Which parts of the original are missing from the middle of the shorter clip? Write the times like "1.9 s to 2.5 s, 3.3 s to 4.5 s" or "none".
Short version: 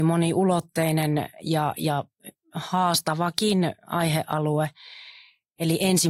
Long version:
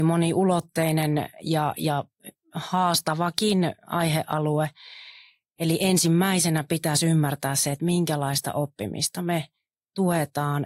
none